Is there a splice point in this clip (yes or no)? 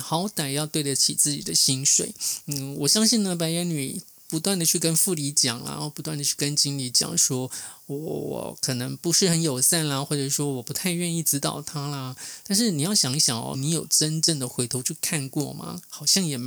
yes